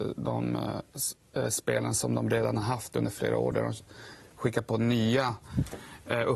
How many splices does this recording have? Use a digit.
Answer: 0